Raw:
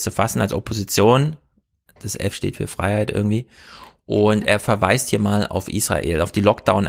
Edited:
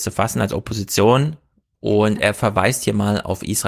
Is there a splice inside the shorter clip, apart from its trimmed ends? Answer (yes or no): yes